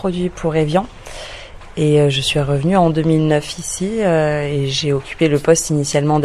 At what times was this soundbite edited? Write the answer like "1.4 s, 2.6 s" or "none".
none